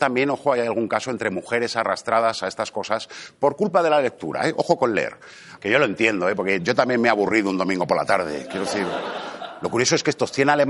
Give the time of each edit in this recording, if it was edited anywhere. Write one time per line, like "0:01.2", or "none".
0:05.6